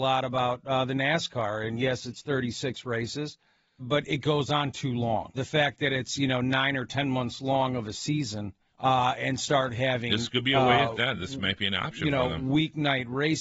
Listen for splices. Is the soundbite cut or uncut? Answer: cut